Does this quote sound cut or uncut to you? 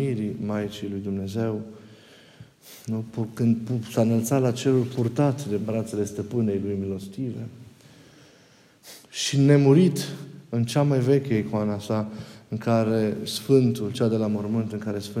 cut